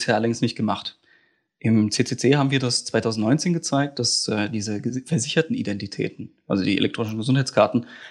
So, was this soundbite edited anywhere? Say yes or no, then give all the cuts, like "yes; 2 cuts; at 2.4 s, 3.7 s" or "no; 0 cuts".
no; 0 cuts